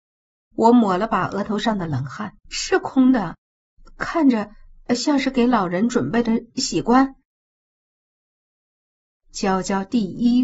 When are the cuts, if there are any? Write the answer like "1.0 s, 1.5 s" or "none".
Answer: 2.4 s